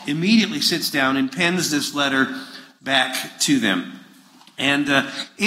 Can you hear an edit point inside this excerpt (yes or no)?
no